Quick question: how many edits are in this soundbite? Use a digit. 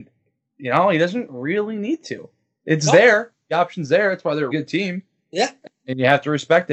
1